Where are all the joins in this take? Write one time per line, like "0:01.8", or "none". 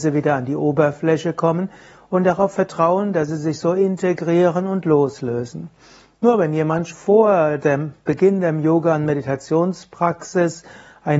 0:06.9